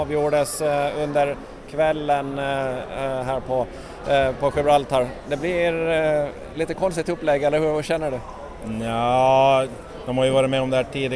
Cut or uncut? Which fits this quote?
uncut